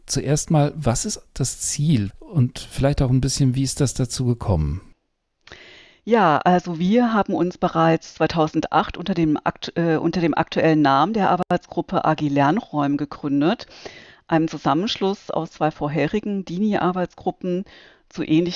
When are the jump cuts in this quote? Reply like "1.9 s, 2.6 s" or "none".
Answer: 2.1 s